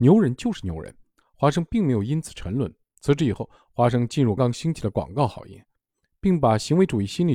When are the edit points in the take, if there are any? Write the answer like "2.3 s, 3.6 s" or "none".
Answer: 4.4 s